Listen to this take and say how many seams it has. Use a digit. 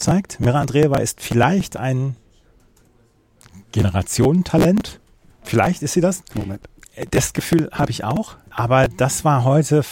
2